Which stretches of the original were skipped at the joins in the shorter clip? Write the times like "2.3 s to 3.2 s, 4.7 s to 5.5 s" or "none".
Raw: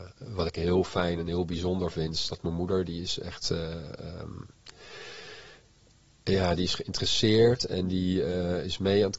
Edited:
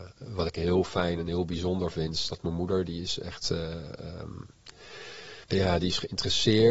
5.4 s to 6.2 s